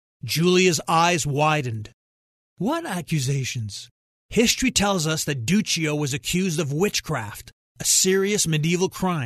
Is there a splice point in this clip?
yes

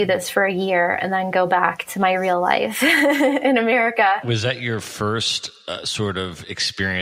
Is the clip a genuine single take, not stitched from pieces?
yes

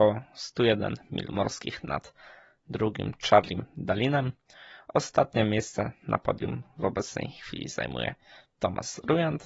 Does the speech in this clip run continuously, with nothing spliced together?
yes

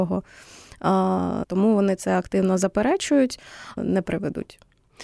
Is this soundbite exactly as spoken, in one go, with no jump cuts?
no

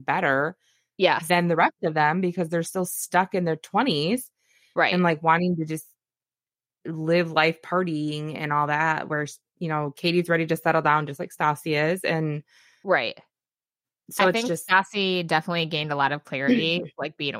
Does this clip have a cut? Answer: no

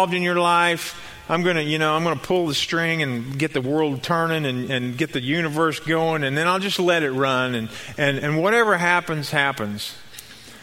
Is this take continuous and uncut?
yes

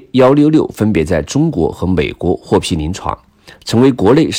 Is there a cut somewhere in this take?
no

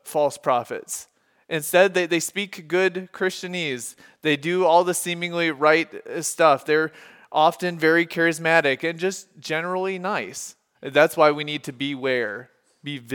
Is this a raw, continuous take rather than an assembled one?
no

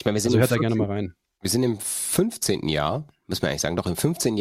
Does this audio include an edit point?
no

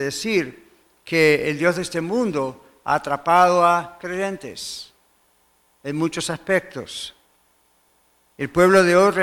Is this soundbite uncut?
yes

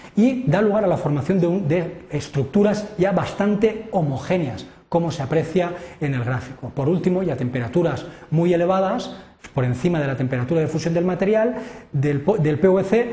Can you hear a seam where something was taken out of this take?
no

